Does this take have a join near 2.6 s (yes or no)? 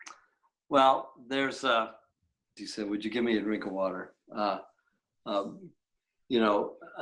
yes